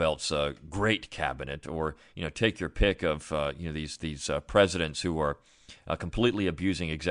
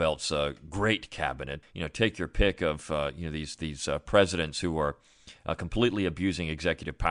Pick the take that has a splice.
second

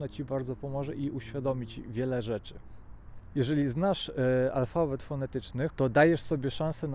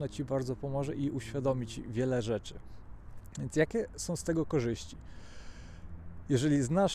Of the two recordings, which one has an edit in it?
first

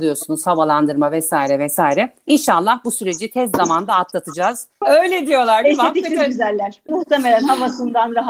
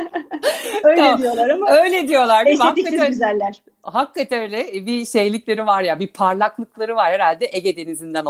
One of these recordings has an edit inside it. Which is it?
first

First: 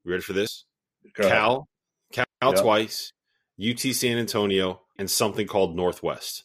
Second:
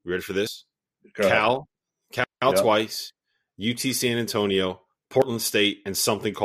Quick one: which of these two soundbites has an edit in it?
first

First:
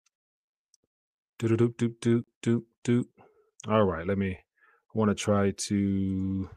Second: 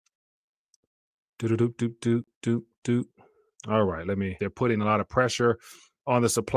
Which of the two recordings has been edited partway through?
second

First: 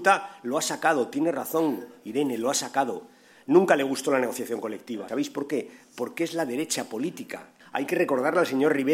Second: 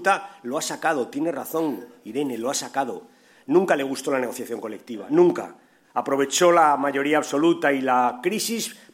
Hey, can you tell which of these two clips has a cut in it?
first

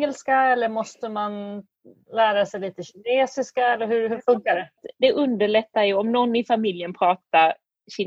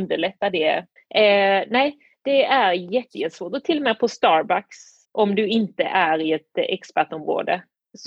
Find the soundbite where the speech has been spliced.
second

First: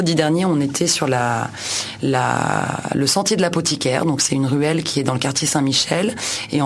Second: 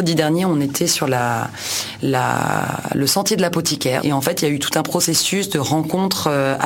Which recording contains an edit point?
second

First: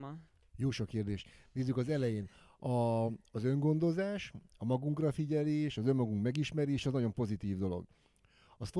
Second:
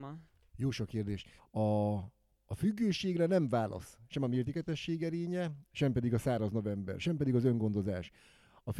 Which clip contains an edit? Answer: second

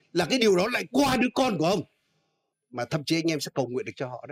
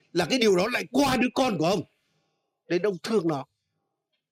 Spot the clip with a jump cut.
first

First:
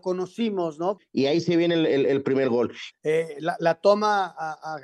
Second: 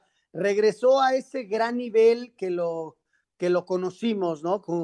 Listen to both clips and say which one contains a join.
first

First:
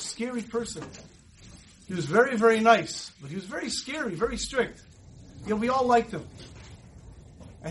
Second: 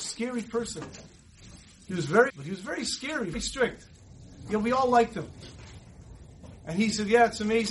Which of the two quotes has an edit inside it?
second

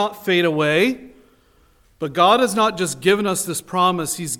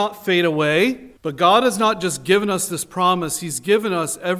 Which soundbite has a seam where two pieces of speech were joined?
second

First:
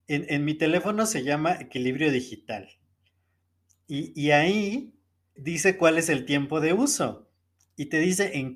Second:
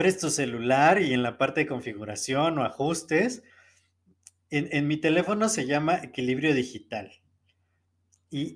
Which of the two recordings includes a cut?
first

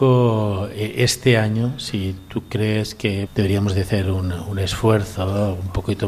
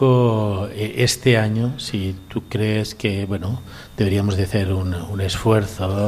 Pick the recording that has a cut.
first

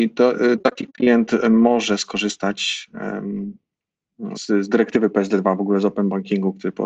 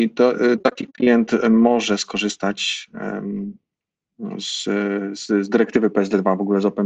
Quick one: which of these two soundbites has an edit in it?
first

